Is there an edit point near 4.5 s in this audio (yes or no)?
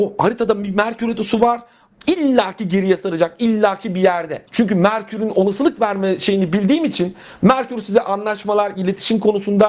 yes